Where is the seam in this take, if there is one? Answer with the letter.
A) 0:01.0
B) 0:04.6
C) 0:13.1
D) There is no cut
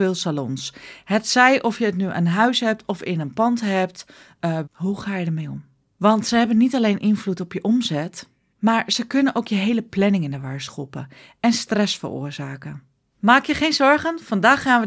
B